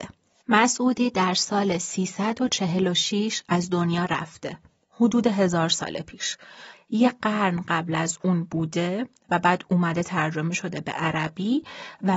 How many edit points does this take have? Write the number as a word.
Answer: one